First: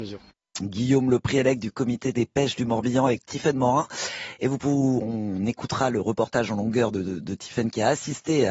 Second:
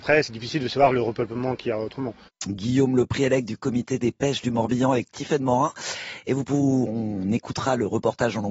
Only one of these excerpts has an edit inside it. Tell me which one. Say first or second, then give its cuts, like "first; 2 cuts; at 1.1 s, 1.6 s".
second; 1 cut; at 2.3 s